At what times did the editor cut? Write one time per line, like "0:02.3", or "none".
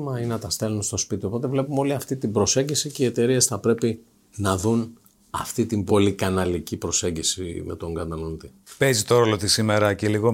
none